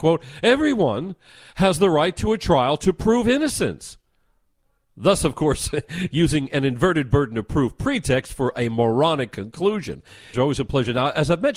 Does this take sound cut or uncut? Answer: cut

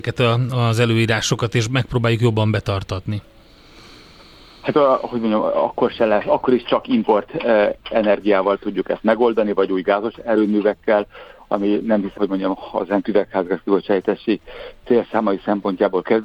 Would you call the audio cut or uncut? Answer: cut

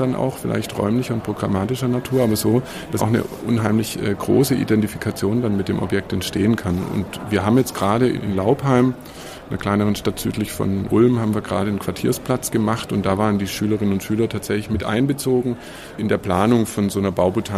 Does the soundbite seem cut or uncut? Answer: cut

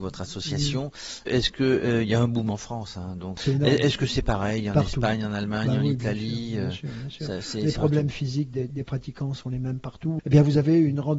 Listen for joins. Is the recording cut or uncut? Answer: cut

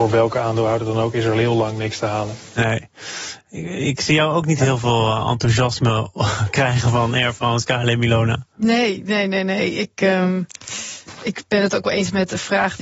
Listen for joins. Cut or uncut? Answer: uncut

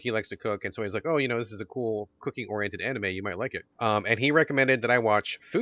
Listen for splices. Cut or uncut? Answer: cut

